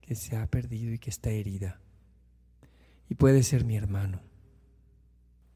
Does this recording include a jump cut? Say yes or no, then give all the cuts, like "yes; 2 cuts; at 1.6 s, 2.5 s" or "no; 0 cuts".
no; 0 cuts